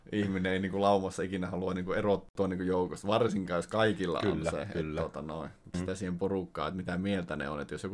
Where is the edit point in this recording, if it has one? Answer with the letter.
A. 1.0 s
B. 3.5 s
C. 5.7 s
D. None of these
C